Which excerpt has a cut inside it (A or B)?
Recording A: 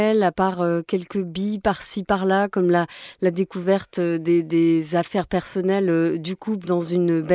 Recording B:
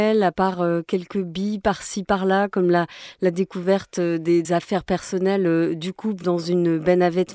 B